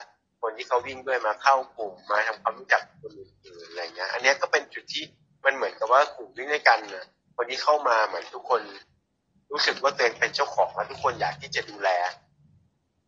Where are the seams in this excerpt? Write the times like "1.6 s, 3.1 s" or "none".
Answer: none